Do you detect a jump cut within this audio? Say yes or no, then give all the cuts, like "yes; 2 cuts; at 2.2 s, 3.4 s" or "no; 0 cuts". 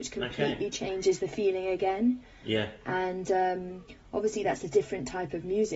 no; 0 cuts